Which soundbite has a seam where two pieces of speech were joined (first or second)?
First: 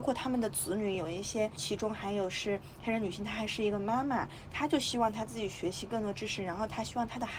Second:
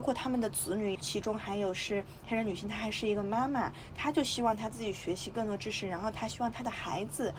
second